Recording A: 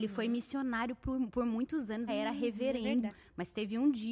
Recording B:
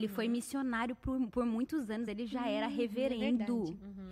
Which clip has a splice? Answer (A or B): A